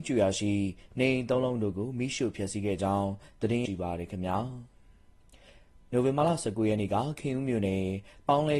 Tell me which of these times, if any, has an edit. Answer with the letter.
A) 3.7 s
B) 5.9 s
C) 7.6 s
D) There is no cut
A